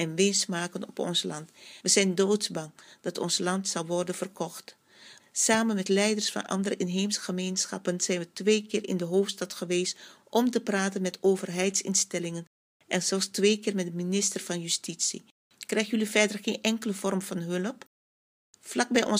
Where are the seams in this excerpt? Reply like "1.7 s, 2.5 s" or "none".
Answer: 1.8 s, 5.2 s, 15.4 s